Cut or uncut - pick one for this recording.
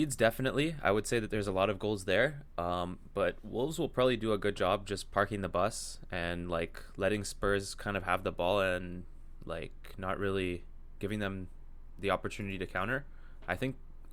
uncut